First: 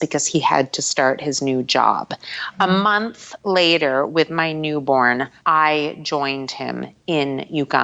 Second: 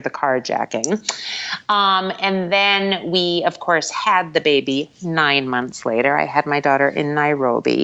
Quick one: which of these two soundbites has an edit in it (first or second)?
first